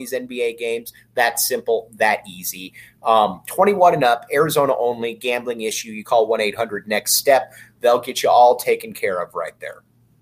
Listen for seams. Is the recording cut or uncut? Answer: uncut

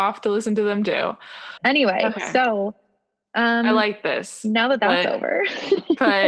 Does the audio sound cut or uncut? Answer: cut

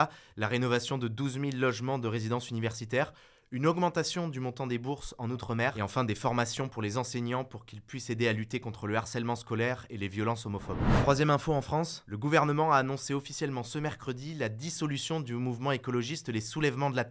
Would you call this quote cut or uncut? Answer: uncut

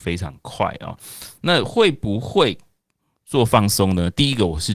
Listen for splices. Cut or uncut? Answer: uncut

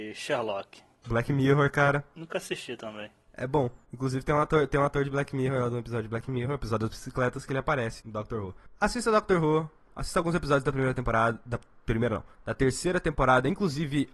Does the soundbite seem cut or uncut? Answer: cut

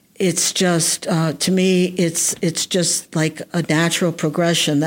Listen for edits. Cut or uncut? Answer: uncut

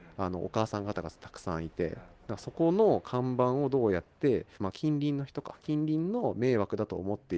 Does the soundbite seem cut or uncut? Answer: cut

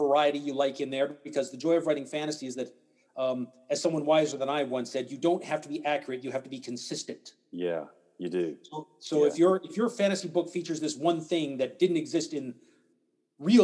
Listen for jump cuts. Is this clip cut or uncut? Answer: uncut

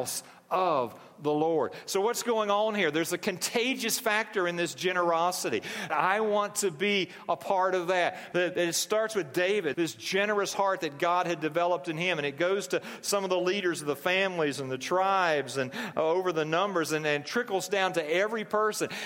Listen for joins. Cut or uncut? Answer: cut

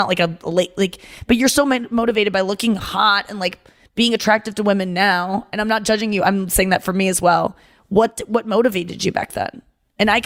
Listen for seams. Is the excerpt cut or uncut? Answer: uncut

